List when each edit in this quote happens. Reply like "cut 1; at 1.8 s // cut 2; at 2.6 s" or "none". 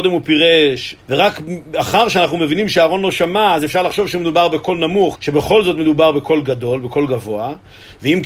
cut 1; at 1.0 s // cut 2; at 5.1 s